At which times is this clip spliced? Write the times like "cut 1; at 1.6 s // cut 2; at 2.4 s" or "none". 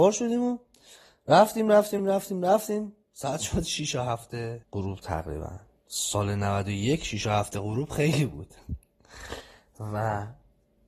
cut 1; at 2.0 s // cut 2; at 4.6 s